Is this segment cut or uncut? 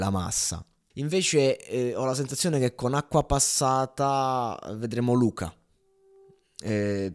cut